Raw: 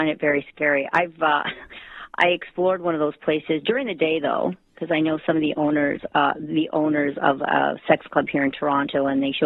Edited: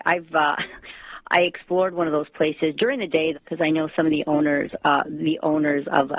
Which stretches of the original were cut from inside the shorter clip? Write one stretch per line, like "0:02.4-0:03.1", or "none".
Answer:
0:04.2-0:04.6